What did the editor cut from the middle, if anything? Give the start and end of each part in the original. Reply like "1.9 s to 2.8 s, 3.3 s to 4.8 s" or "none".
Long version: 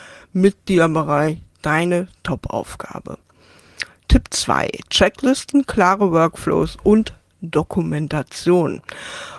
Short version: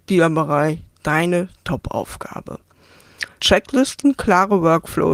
4.0 s to 4.9 s